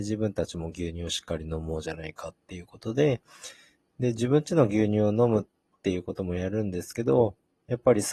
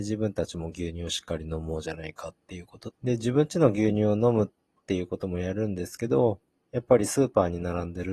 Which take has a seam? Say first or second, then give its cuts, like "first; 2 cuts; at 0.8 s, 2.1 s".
second; 1 cut; at 2.9 s